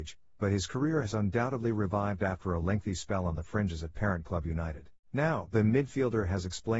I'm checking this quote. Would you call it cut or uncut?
cut